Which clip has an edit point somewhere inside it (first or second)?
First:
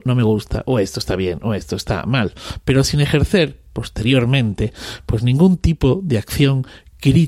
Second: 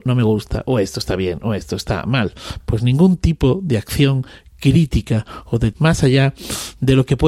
second